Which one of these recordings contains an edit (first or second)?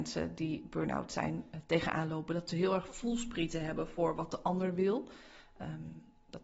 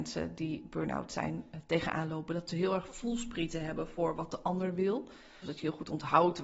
second